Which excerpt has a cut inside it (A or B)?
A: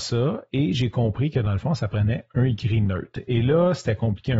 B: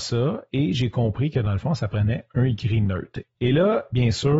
B